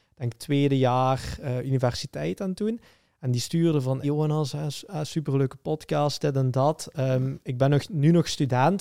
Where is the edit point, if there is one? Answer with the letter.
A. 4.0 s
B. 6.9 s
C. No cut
A